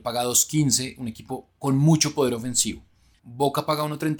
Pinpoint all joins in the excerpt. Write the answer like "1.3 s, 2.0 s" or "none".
3.2 s